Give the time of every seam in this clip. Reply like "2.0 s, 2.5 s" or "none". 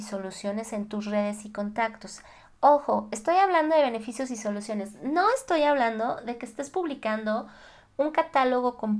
none

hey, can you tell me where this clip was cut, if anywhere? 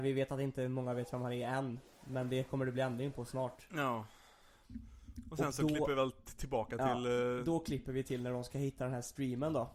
none

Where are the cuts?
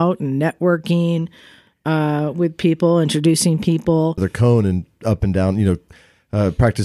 4.2 s

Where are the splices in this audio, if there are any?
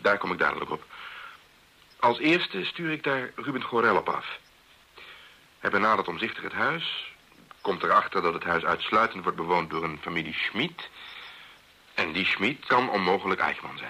12.7 s

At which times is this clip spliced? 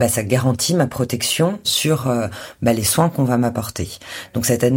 1.6 s

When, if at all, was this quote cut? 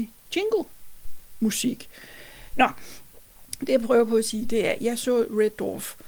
2.5 s

